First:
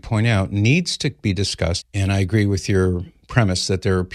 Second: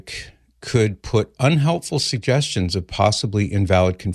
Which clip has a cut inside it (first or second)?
first